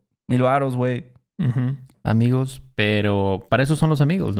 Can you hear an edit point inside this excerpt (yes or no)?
yes